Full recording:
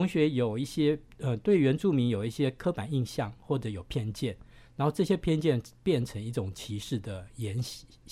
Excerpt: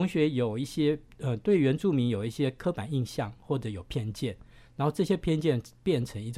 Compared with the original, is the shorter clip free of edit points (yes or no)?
yes